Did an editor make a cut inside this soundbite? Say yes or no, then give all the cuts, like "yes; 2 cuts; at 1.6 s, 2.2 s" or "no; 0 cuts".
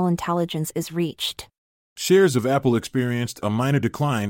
yes; 1 cut; at 1.9 s